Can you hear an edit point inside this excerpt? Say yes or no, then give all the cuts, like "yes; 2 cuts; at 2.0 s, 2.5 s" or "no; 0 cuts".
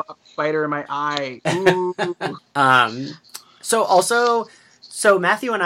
yes; 1 cut; at 2.4 s